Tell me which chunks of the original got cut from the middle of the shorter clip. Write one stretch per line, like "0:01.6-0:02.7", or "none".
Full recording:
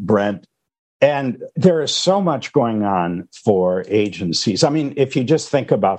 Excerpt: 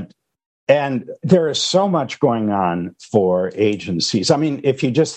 none